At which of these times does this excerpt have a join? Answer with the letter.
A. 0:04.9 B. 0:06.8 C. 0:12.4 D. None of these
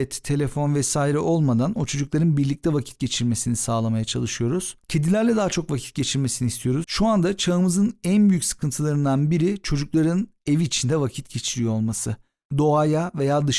B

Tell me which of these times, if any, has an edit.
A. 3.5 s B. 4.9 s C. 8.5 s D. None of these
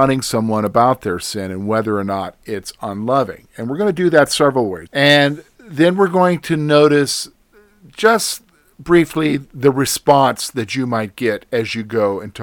B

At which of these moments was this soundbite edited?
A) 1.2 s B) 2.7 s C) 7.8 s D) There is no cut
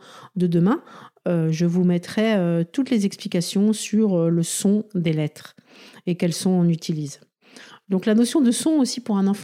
D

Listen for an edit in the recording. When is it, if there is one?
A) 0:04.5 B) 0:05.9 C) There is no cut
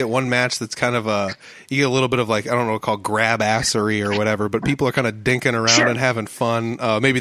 C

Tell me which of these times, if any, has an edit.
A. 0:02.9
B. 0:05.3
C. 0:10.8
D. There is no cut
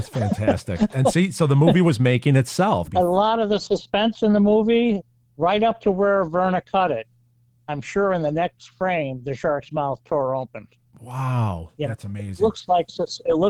A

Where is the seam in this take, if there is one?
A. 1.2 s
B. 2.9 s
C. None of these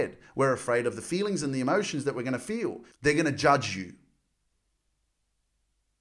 B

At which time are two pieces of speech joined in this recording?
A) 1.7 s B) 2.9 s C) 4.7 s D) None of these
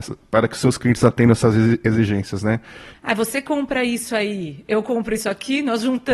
B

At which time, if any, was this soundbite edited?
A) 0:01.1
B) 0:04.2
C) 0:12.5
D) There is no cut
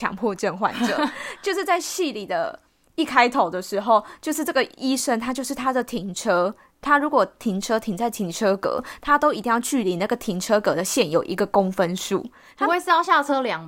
D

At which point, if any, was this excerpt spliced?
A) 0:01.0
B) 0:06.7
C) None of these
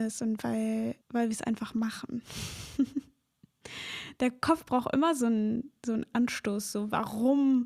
A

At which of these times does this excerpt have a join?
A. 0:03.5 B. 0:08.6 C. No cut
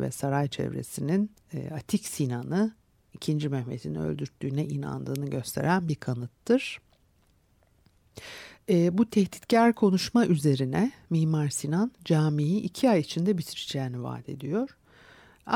C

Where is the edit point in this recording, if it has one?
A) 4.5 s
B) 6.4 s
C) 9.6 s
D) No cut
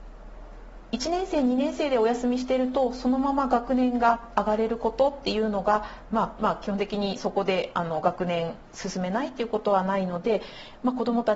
B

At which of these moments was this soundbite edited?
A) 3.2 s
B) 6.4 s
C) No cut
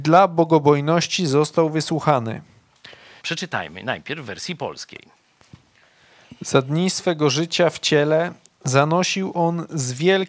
A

